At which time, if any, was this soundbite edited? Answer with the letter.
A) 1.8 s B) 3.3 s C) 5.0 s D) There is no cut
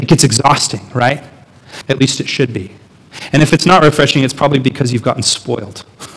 A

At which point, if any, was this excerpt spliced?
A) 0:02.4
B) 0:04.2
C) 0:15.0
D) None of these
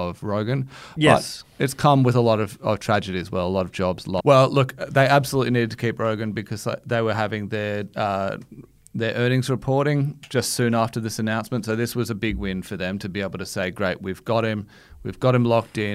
B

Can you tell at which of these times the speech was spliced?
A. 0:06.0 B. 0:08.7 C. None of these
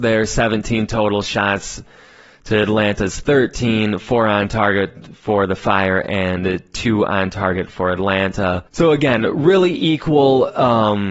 B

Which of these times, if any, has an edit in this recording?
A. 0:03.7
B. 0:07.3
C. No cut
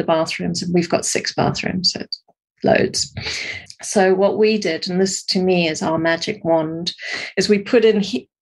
A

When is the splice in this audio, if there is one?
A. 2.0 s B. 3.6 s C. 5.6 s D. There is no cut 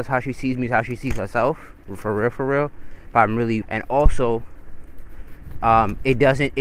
B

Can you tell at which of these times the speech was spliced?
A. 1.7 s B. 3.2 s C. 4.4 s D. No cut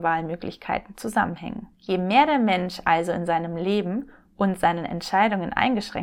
A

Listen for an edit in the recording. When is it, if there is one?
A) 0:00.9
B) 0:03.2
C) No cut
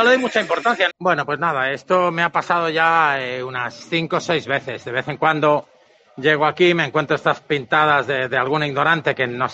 A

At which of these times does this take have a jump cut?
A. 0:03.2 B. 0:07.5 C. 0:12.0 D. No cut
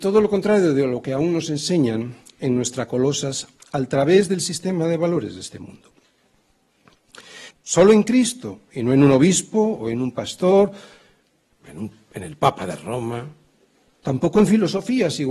B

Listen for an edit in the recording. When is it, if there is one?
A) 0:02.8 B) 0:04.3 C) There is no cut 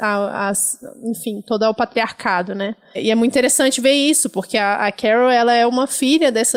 C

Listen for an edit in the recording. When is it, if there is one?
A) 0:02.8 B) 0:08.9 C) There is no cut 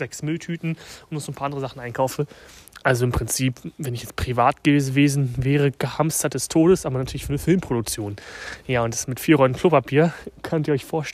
C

